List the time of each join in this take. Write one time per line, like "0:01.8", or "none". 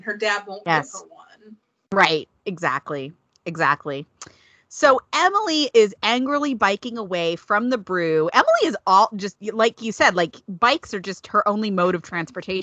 none